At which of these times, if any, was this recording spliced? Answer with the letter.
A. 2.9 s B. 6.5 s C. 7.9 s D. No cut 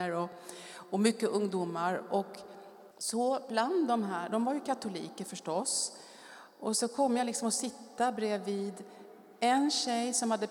A